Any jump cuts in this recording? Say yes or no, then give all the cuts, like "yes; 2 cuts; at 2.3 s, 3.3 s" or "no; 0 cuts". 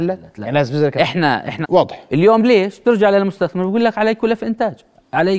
yes; 1 cut; at 1.6 s